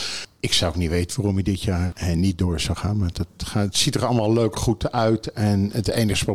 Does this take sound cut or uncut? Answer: uncut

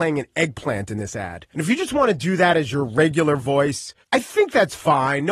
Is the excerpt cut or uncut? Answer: cut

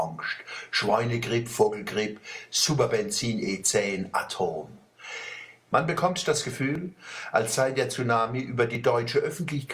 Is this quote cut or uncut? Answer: cut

